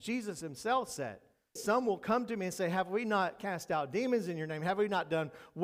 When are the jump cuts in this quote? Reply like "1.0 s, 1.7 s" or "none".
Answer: 1.6 s